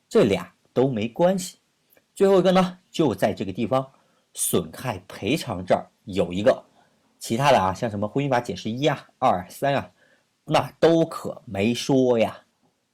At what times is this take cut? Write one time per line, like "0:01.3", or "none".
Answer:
none